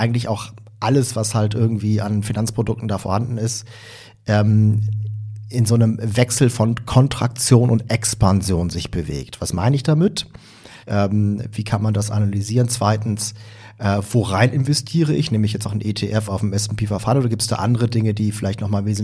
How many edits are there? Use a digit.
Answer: 2